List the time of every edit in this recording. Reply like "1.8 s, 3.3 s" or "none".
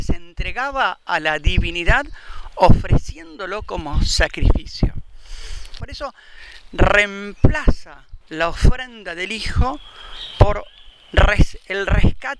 5.8 s, 8.2 s